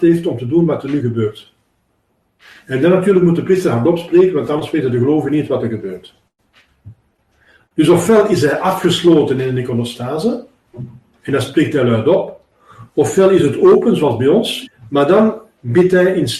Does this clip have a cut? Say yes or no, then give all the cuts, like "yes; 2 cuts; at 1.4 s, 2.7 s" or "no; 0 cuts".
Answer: yes; 1 cut; at 14.7 s